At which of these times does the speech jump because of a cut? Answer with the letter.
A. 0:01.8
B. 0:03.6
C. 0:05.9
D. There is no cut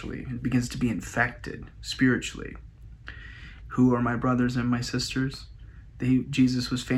B